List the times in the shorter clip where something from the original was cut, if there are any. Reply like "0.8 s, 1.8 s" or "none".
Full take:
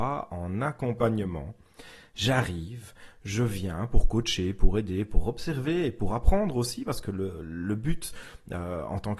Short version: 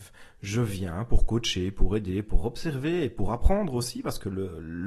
none